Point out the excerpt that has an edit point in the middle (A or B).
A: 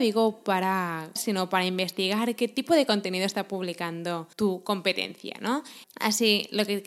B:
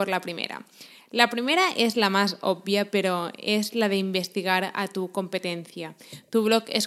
A